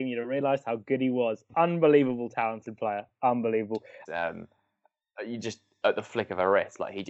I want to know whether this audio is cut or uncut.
cut